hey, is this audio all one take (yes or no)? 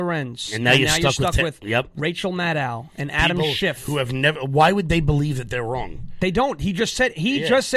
yes